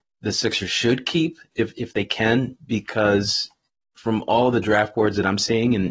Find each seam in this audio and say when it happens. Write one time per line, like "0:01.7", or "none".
none